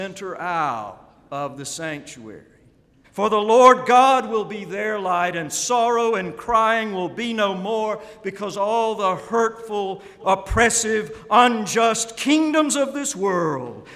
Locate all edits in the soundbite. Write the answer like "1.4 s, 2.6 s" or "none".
3.0 s, 10.2 s